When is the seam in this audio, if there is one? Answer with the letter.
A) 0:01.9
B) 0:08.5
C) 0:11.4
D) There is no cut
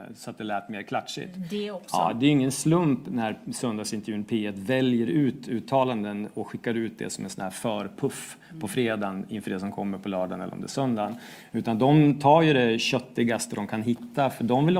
D